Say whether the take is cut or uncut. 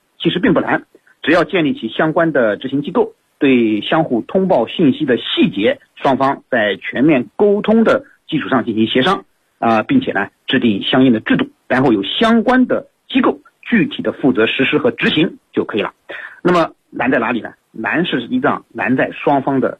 cut